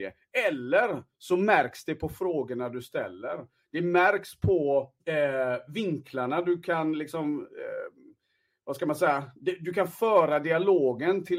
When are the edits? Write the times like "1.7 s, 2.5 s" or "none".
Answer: 5.0 s